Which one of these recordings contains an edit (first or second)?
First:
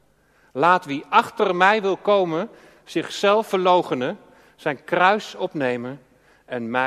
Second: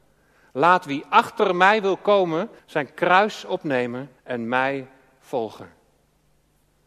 second